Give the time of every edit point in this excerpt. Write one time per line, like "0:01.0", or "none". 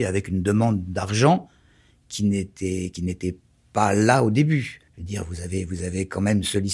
0:04.9